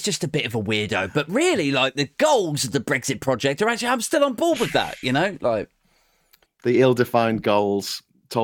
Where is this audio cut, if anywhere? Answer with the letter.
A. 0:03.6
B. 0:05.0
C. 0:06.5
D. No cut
C